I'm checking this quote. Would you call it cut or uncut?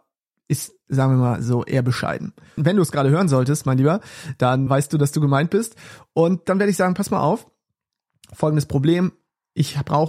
cut